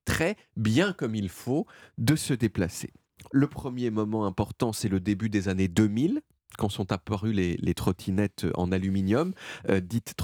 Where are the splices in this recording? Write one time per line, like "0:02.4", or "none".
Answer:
0:03.3